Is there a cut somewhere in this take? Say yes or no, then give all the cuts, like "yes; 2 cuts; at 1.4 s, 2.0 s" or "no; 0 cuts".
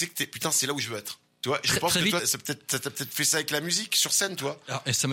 yes; 1 cut; at 2.2 s